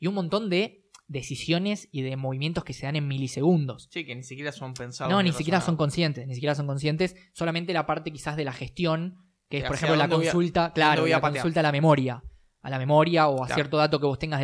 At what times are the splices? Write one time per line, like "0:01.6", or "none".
none